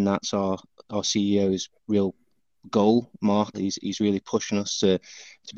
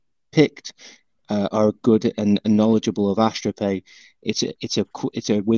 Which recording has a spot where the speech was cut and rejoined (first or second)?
first